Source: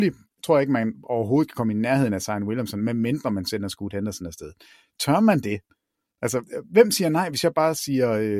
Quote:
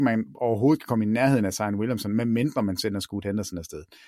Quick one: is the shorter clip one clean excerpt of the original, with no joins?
yes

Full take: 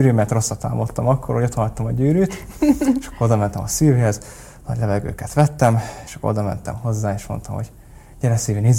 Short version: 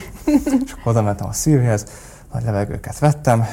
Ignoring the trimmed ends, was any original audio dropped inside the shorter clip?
no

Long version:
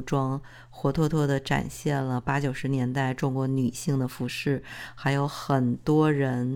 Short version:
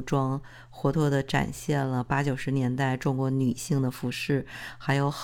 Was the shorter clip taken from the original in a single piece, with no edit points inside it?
no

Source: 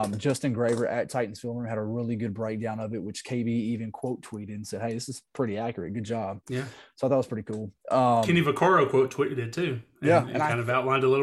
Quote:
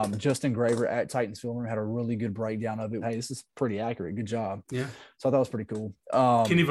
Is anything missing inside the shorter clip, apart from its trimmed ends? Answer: yes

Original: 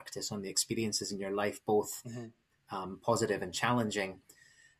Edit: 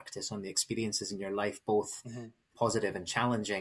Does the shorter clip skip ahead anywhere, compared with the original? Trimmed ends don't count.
yes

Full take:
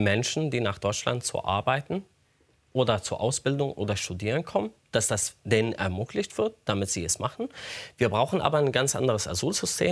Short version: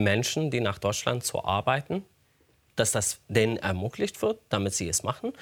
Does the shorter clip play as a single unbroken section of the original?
no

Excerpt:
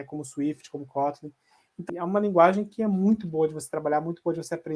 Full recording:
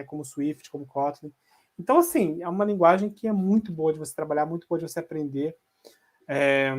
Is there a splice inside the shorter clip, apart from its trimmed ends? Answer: yes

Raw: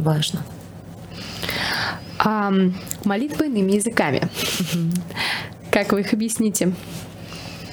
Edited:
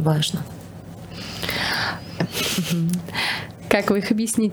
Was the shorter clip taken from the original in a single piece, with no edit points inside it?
no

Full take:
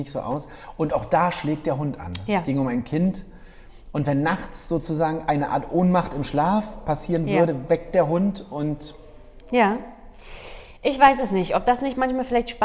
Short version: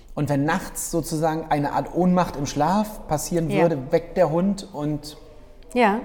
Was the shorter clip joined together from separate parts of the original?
no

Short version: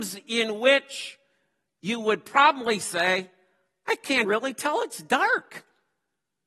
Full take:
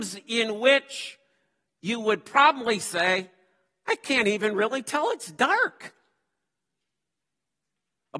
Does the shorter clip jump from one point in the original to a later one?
yes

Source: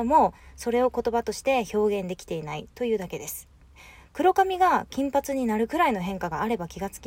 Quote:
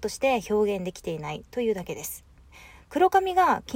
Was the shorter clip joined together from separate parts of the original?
no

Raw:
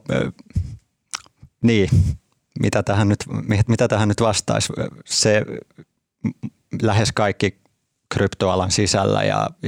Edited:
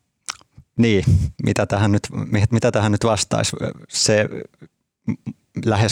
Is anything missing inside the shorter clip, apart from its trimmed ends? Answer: yes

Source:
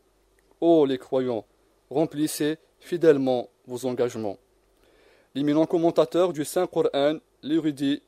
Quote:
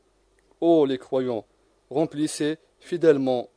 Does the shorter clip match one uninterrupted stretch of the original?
yes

